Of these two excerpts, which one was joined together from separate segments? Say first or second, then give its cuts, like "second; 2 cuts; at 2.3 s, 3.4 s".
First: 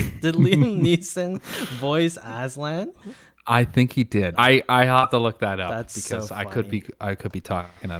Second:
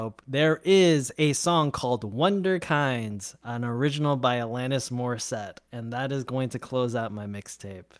first; 1 cut; at 4.3 s